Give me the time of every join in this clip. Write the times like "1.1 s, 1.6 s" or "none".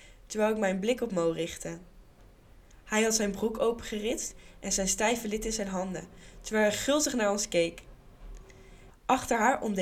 8.9 s